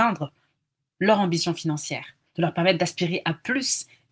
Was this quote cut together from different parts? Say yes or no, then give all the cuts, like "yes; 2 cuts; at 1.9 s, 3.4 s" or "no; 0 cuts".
yes; 1 cut; at 2.2 s